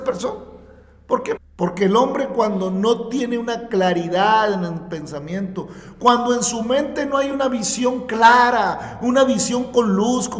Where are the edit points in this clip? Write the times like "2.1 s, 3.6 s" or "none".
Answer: 1.4 s, 9.0 s